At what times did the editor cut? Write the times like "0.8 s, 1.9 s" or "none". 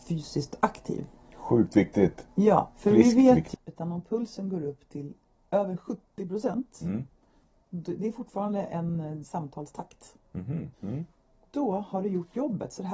3.5 s, 10.7 s